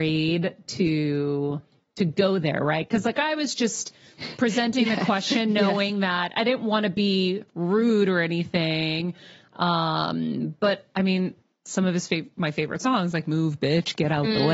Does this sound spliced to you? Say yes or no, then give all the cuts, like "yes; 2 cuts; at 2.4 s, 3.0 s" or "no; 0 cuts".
no; 0 cuts